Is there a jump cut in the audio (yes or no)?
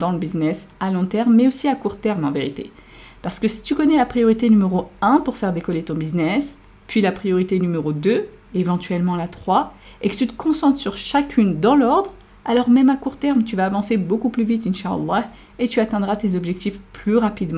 no